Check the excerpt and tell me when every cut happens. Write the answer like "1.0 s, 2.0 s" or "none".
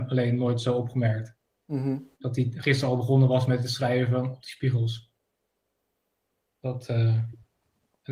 2.1 s